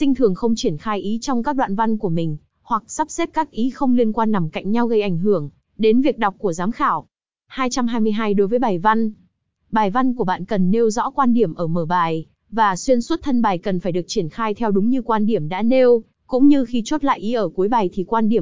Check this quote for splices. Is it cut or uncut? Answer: uncut